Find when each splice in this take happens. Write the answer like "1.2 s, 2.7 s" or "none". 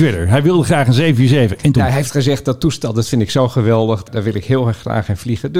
none